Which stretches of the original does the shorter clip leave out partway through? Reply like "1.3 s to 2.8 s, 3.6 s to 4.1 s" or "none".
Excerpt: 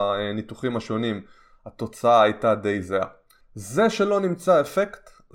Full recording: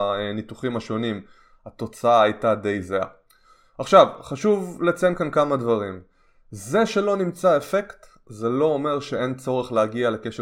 3.4 s to 6.4 s